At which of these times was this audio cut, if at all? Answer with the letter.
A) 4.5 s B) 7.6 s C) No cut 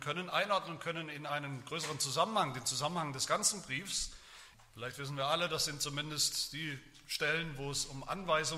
A